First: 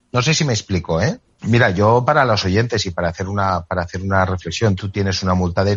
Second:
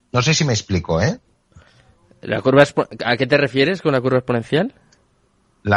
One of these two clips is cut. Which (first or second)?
first